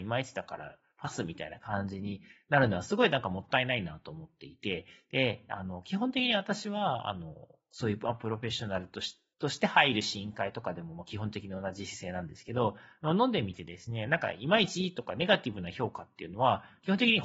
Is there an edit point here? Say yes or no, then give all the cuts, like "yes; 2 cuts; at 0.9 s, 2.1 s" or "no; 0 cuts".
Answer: yes; 1 cut; at 9.3 s